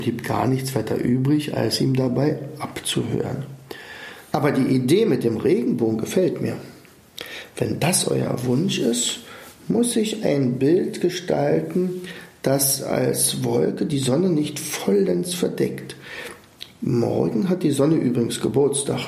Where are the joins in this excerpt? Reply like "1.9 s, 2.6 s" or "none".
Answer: 4.3 s

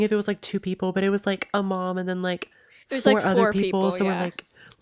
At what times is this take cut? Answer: none

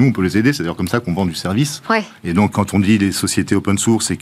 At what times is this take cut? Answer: 2.5 s

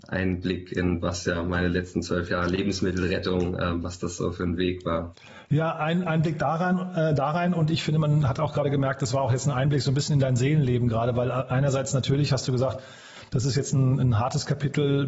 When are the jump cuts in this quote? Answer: none

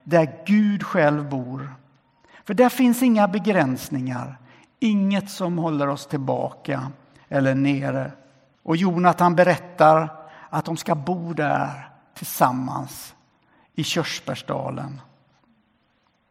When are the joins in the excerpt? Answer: 8.5 s

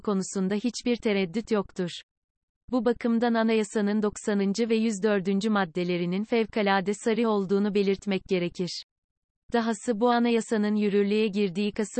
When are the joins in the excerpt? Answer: none

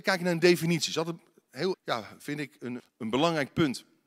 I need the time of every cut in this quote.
1.7 s, 2.8 s

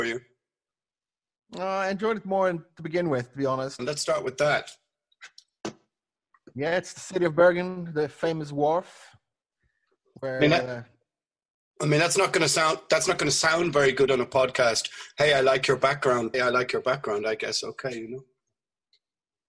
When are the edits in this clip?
3.8 s, 16.3 s

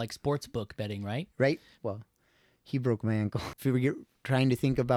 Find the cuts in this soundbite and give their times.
1.7 s, 3.6 s

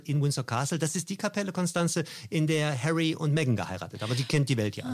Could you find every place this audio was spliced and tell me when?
none

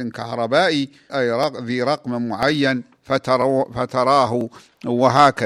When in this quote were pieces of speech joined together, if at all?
1.1 s

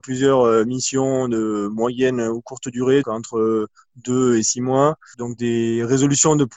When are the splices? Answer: 3.0 s, 5.1 s

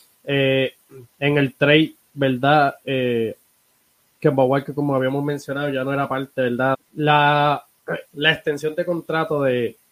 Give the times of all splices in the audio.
6.7 s, 8.1 s

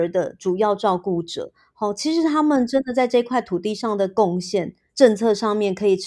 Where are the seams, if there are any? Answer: 4.9 s

